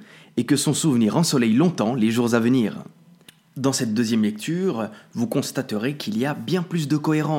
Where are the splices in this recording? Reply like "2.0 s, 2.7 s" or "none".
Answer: none